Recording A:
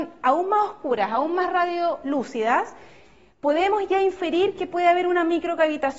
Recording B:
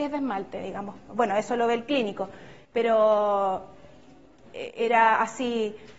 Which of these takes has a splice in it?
B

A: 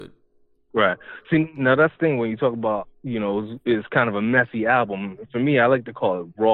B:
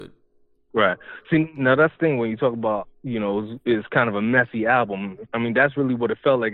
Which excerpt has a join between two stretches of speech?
B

